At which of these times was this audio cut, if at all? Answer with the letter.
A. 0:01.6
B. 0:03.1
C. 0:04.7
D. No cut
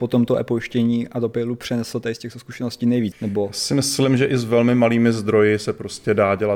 B